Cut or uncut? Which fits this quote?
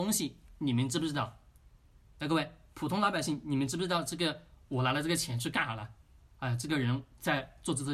cut